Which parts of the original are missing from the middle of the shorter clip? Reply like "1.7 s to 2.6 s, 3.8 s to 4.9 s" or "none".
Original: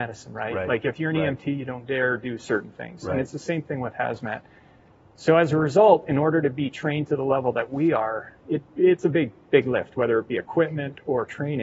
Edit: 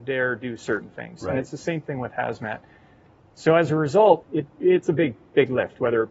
6.0 s to 8.4 s